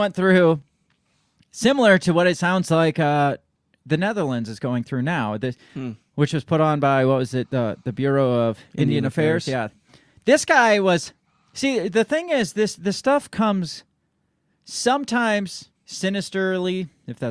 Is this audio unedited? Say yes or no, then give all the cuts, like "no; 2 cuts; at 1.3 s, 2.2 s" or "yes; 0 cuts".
no; 2 cuts; at 5.7 s, 15.8 s